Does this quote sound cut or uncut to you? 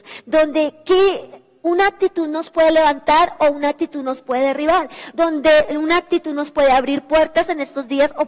uncut